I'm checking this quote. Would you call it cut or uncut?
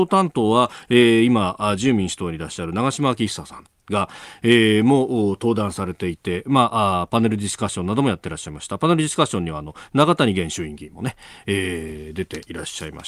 uncut